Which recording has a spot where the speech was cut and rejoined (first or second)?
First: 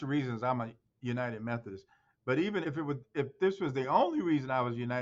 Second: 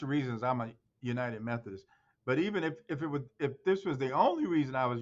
first